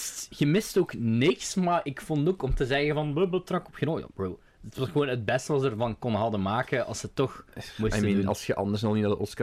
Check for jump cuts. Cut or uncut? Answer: cut